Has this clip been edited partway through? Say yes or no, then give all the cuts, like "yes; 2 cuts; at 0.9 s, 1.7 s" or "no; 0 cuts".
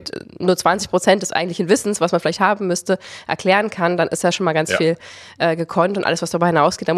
no; 0 cuts